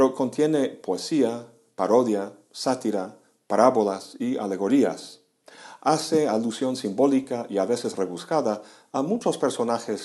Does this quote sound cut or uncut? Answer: uncut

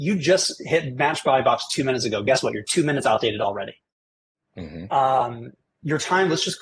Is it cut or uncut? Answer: cut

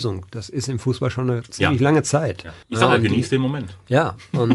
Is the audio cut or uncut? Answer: cut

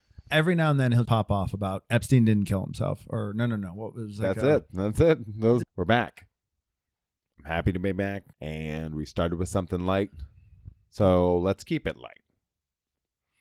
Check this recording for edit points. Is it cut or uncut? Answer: cut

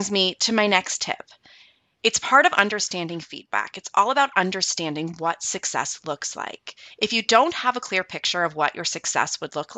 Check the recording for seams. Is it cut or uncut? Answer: uncut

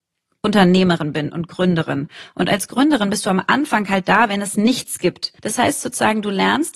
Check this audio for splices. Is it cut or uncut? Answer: cut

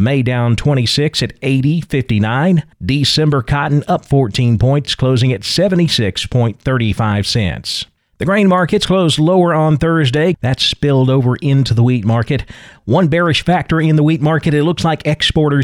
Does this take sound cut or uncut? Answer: cut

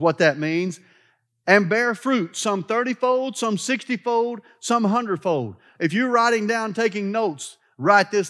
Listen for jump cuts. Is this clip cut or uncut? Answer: uncut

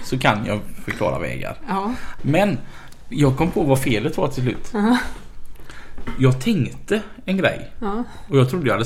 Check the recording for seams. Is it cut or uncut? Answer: cut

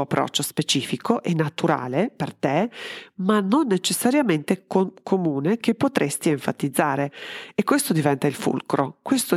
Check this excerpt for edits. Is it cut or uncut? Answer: uncut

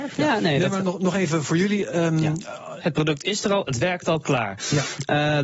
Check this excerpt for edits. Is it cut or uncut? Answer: cut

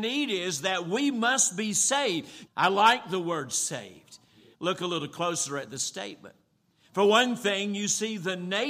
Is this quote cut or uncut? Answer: cut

